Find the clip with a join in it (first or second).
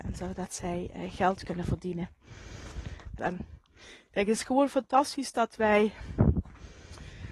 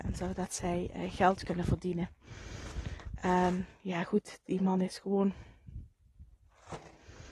first